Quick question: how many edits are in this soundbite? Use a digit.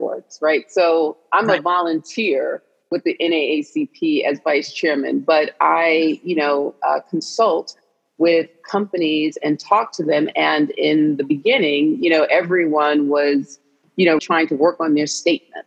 1